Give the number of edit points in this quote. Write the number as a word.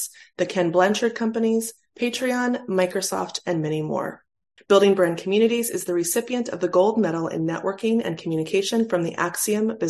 two